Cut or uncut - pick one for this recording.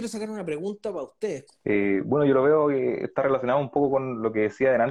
cut